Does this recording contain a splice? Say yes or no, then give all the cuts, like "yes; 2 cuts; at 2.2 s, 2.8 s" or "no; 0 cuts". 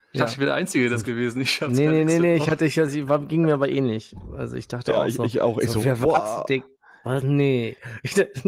no; 0 cuts